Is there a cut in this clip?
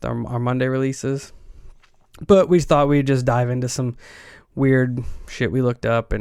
no; 0 cuts

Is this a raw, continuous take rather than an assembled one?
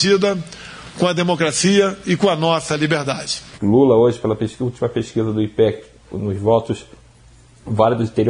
no; 2 cuts; at 3.5 s, 6.1 s

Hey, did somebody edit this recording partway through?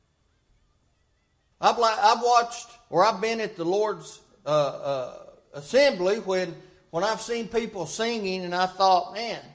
no; 0 cuts

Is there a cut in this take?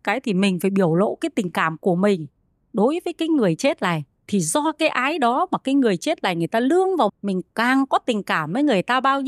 yes; 1 cut; at 7.1 s

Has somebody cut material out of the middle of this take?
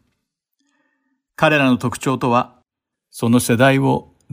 yes; 1 cut; at 2.9 s

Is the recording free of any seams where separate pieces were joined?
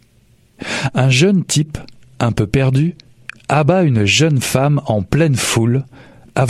yes; 0 cuts

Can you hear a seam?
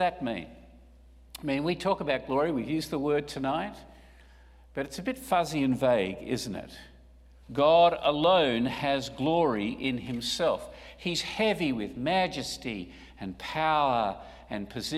yes; 1 cut; at 7.4 s

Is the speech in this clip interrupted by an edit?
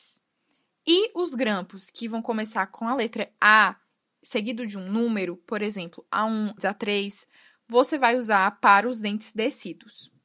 yes; 1 cut; at 6.6 s

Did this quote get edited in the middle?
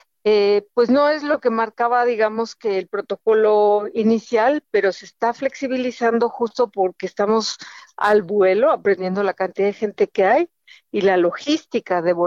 no; 0 cuts

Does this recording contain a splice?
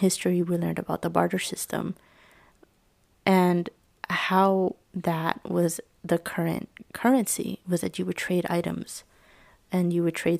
no; 0 cuts

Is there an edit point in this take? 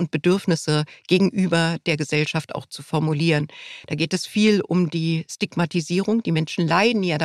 no; 0 cuts

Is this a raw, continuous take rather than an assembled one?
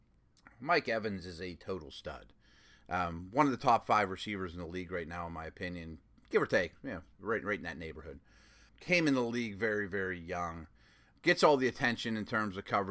no; 1 cut; at 8.7 s

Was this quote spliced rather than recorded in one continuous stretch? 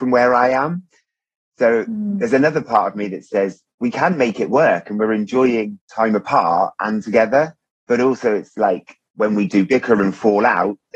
no; 0 cuts

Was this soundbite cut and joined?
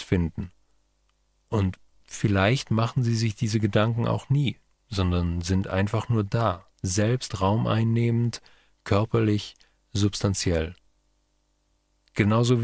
yes; 1 cut; at 6.7 s

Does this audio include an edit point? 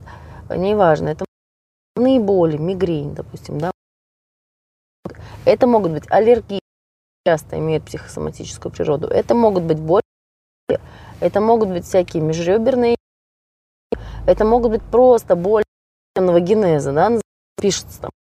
no; 0 cuts

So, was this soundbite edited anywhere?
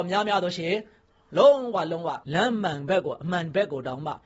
yes; 1 cut; at 2.2 s

